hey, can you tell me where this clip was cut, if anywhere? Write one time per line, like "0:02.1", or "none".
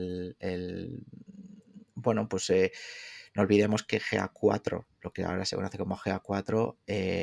none